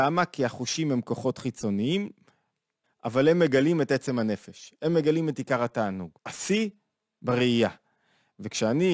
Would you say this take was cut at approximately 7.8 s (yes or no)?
no